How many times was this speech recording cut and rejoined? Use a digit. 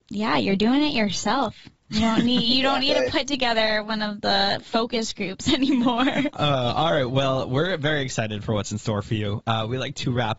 1